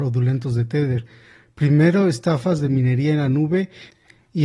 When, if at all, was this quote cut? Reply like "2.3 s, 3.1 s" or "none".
1.4 s